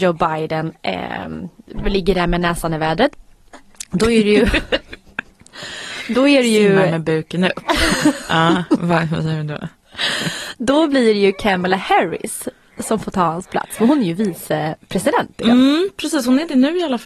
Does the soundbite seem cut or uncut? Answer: uncut